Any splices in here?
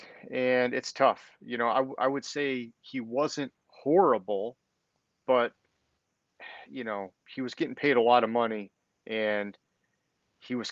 no; 0 cuts

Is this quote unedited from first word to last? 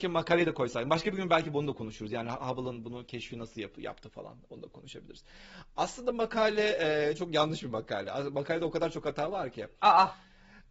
yes; 0 cuts

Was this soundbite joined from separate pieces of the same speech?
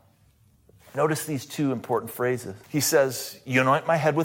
yes; 1 cut; at 2.6 s

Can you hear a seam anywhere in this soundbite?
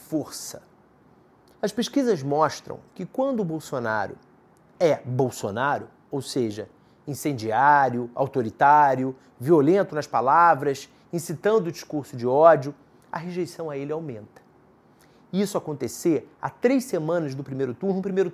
yes; 1 cut; at 1.5 s

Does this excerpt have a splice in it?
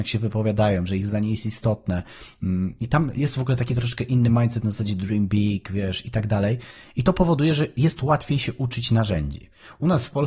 no; 0 cuts

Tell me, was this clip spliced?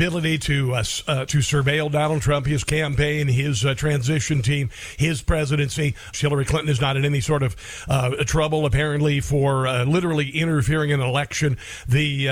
yes; 2 cuts; at 1.3 s, 6.1 s

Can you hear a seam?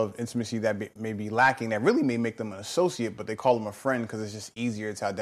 no; 0 cuts

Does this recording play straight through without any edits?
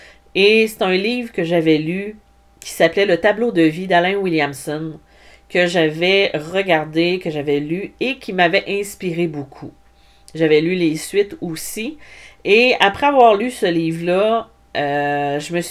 yes; 0 cuts

